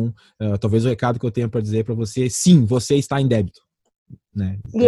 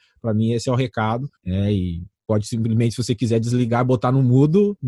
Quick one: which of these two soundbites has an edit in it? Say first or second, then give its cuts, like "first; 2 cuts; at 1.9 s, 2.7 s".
second; 1 cut; at 1.4 s